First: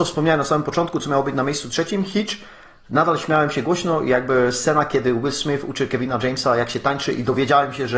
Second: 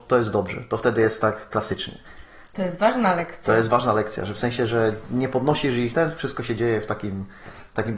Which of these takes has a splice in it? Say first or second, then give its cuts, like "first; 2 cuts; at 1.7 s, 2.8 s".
second; 1 cut; at 5.9 s